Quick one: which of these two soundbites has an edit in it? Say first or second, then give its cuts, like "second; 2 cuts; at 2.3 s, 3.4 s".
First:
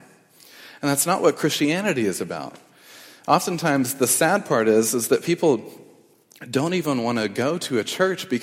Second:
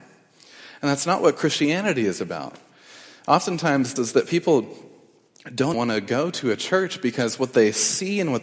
second; 2 cuts; at 4.0 s, 5.7 s